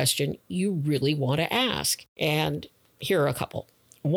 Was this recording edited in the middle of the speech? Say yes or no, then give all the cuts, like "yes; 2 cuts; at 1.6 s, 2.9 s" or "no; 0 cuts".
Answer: yes; 1 cut; at 2.1 s